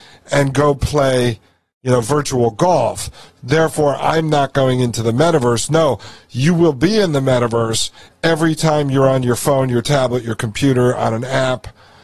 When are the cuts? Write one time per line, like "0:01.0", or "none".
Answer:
none